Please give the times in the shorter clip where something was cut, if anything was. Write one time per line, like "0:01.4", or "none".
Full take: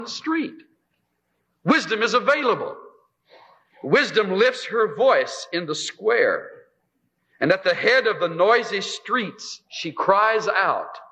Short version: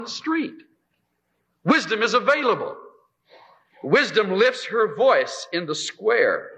none